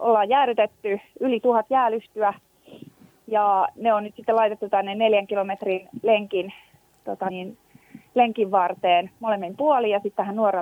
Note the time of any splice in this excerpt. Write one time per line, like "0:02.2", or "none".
0:07.3